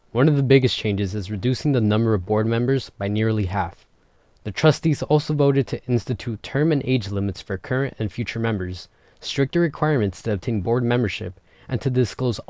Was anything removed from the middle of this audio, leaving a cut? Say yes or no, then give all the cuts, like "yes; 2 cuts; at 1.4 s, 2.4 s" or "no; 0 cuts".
no; 0 cuts